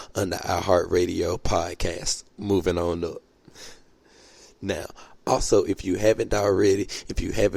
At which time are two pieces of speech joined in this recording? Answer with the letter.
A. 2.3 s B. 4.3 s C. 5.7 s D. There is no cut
A